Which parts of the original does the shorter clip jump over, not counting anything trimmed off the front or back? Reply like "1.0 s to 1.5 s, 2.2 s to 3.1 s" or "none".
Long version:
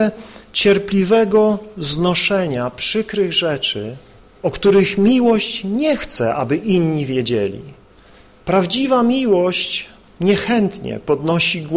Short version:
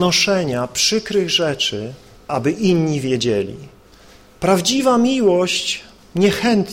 4.3 s to 6.3 s